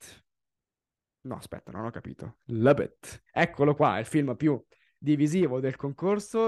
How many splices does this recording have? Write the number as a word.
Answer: one